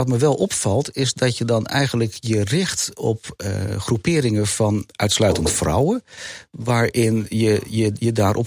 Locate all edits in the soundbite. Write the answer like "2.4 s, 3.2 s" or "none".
none